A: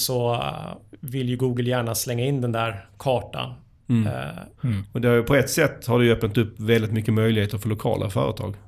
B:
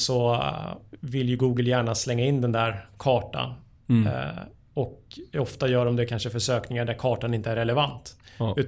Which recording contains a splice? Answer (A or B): A